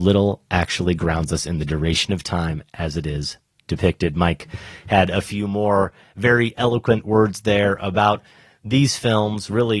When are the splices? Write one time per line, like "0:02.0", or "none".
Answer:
none